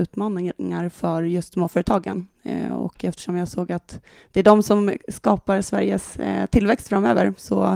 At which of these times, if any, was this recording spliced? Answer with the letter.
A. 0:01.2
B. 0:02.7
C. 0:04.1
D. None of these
D